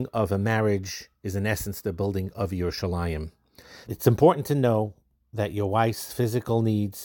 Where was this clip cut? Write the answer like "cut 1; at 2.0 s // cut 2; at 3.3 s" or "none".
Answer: cut 1; at 3.9 s